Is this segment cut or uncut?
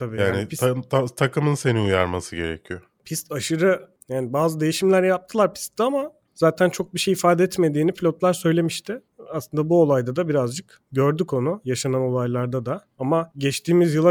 uncut